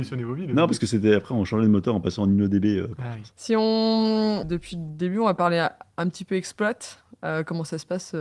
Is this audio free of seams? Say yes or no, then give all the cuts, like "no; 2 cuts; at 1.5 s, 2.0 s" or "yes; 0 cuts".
no; 2 cuts; at 3.3 s, 4.4 s